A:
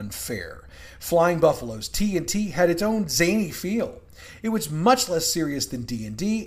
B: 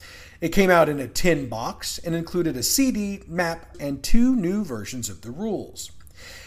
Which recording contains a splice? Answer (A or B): B